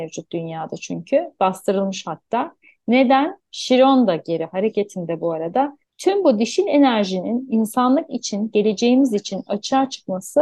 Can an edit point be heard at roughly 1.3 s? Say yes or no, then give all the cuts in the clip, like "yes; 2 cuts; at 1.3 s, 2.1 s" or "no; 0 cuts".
no; 2 cuts; at 3.4 s, 5.9 s